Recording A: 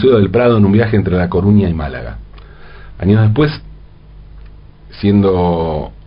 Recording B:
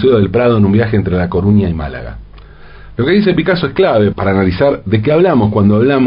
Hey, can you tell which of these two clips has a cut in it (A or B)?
B